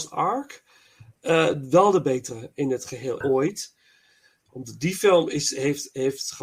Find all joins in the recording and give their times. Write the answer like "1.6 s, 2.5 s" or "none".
3.2 s